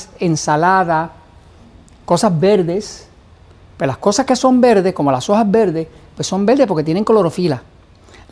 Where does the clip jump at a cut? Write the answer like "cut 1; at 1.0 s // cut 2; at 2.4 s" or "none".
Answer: none